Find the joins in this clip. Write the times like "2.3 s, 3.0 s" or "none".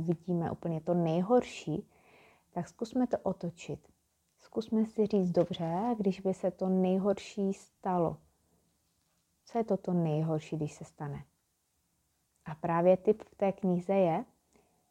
none